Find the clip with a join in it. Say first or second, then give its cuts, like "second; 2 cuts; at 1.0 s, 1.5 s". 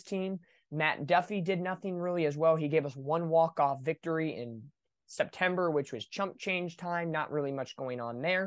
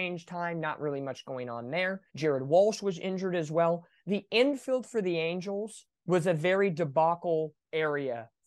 second; 2 cuts; at 2.1 s, 5.9 s